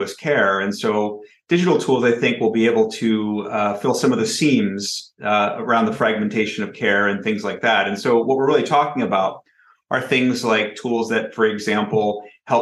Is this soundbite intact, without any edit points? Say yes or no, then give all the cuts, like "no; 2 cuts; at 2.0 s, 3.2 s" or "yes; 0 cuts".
yes; 0 cuts